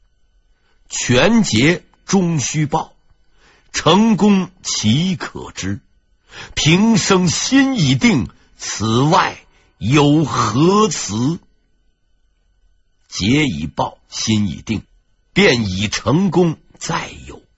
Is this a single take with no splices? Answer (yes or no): yes